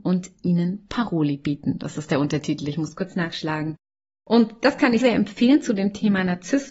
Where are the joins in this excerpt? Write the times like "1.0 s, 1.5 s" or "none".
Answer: 5.0 s